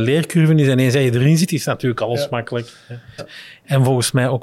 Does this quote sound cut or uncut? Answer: cut